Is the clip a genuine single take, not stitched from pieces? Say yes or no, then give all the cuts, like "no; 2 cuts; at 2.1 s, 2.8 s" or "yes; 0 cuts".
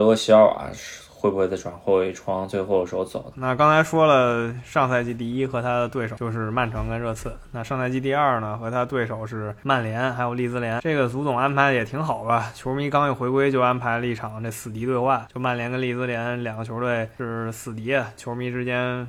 no; 1 cut; at 3.3 s